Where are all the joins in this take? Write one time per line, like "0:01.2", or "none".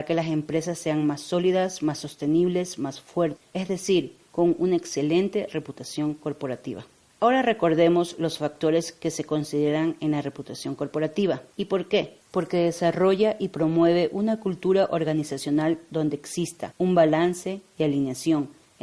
0:11.5